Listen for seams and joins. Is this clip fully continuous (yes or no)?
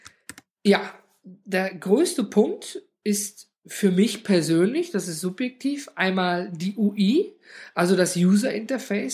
yes